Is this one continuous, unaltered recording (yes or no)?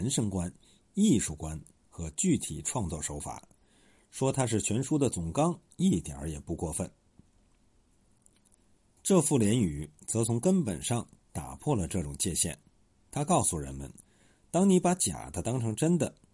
no